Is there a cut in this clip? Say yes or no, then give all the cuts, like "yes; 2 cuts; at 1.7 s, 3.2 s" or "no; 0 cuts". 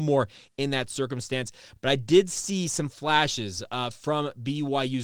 no; 0 cuts